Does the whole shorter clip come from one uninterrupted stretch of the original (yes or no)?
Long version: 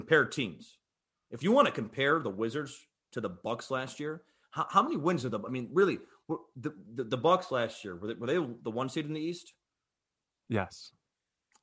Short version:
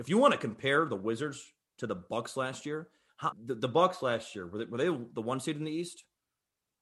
no